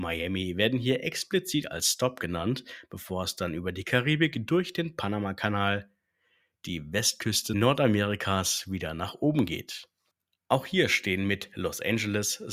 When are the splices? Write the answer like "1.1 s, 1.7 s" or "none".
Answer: none